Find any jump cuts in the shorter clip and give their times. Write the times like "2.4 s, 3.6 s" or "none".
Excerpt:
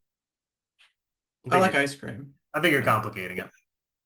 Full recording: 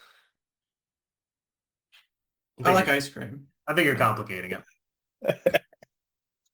none